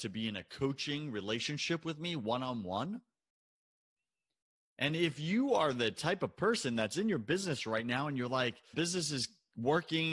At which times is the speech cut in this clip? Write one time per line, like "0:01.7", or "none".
0:08.7